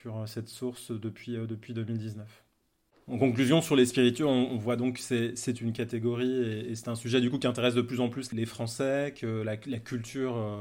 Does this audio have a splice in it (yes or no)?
no